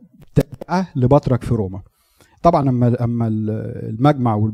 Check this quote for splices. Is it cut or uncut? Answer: uncut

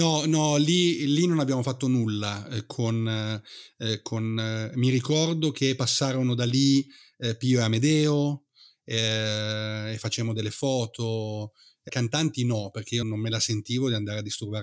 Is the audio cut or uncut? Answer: cut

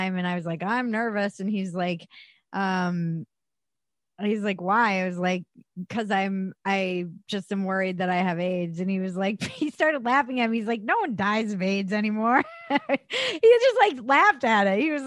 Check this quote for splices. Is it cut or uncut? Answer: uncut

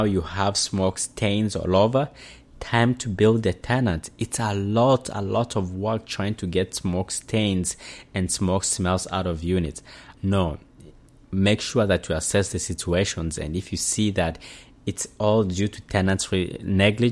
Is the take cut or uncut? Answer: cut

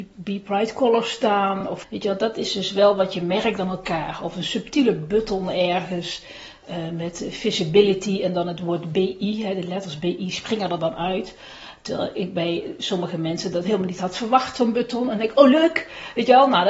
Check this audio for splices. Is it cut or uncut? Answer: uncut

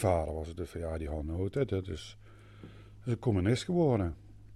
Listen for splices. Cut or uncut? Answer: uncut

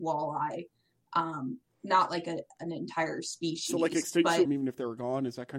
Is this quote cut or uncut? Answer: cut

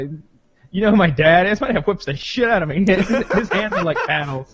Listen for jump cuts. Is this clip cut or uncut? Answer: uncut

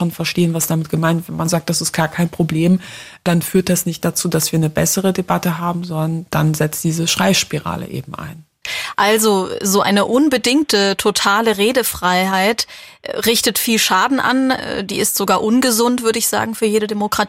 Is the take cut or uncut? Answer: uncut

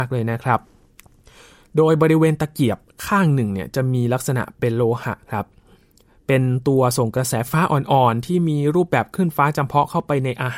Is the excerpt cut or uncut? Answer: cut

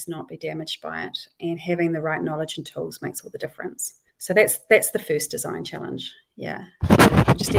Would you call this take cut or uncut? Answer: cut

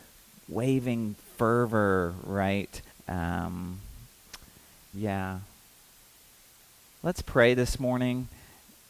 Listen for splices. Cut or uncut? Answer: cut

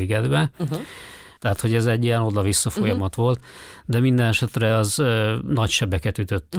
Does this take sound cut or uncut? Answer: cut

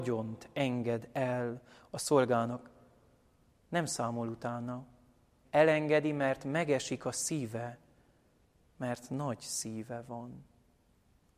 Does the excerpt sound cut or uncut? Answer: cut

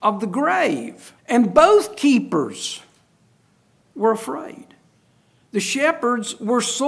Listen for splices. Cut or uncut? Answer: cut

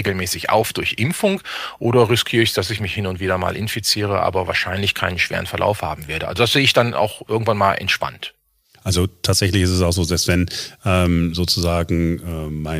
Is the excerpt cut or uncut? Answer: uncut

